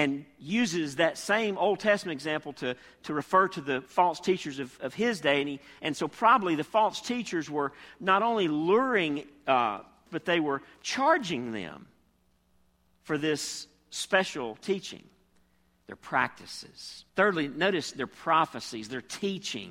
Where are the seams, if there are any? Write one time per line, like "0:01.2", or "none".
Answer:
0:10.1
0:15.8
0:17.1